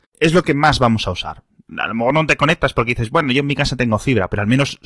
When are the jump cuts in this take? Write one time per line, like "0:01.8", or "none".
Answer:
none